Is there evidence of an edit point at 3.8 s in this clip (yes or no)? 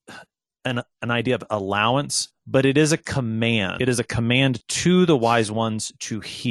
yes